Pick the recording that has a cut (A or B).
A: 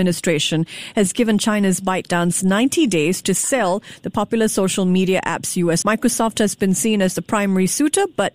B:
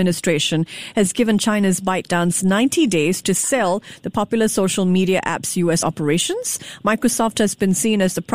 A